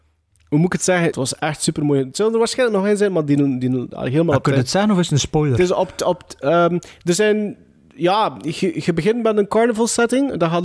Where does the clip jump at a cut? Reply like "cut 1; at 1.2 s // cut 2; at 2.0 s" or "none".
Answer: cut 1; at 1.1 s